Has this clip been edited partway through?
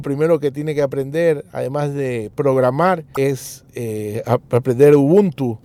no; 0 cuts

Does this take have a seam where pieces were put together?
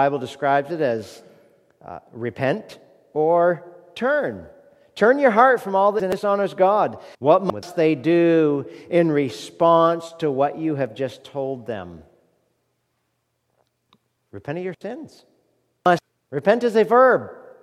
yes; 1 cut; at 7.1 s

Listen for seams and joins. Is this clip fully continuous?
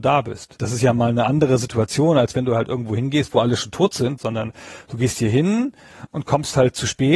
no; 1 cut; at 4.2 s

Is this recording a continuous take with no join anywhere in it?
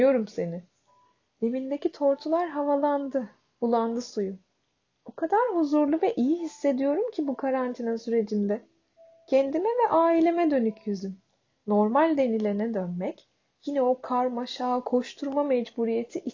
no; 1 cut; at 1.3 s

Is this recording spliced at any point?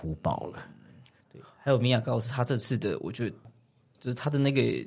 no; 0 cuts

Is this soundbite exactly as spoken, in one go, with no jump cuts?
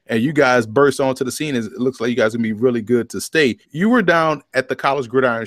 no; 1 cut; at 3.6 s

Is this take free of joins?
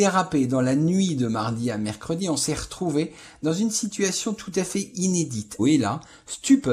no; 1 cut; at 5.6 s

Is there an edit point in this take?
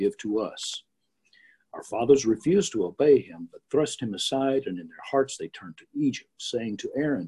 no; 0 cuts

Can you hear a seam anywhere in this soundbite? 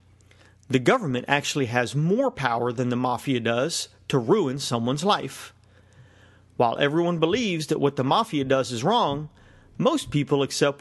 no; 0 cuts

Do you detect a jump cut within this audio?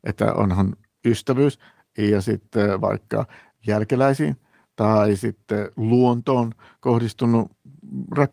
no; 0 cuts

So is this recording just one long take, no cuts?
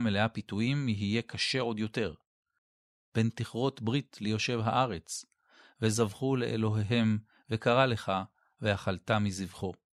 no; 1 cut; at 5.6 s

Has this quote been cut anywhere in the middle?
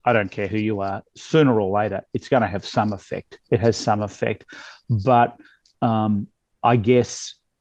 no; 0 cuts

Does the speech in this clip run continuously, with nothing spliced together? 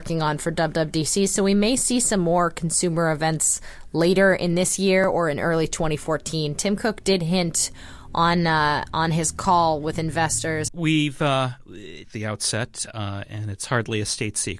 no; 2 cuts; at 10.7 s, 12.0 s

